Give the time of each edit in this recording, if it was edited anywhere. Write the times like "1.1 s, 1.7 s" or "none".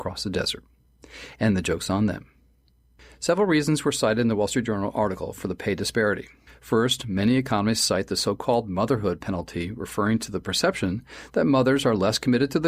none